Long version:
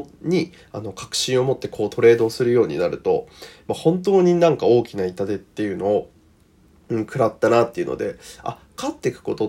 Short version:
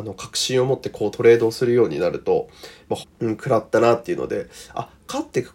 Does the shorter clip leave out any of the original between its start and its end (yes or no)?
yes